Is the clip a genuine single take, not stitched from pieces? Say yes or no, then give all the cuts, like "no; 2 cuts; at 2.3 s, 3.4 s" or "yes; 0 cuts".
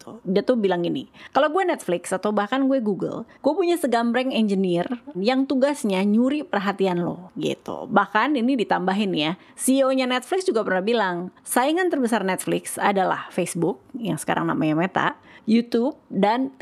no; 1 cut; at 5.1 s